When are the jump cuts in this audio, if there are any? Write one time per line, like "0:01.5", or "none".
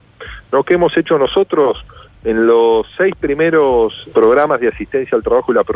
0:04.1

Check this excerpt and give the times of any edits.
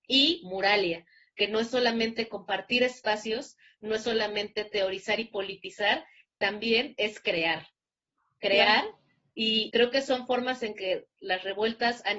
0:09.7

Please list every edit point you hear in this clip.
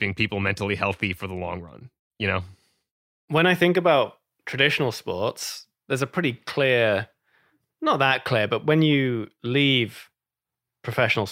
none

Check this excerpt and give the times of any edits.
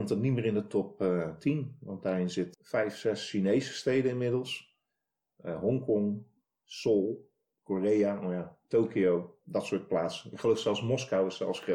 none

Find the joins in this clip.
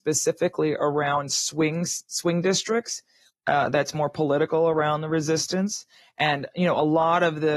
0:03.3

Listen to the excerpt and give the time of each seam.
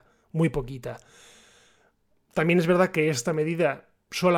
none

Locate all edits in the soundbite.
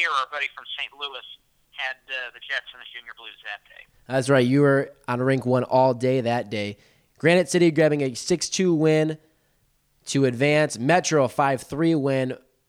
none

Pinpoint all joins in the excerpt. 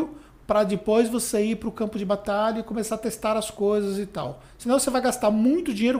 none

